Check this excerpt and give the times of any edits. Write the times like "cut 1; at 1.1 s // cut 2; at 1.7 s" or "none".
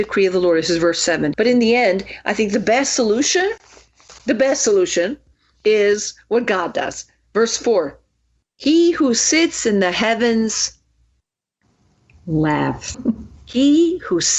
cut 1; at 1.3 s // cut 2; at 12.9 s